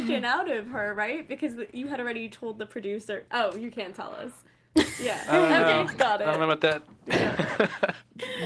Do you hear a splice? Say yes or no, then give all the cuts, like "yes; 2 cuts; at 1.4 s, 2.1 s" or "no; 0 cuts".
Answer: no; 0 cuts